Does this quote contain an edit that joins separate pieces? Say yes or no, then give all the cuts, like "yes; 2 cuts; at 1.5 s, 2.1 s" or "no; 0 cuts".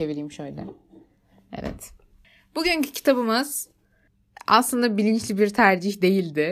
no; 0 cuts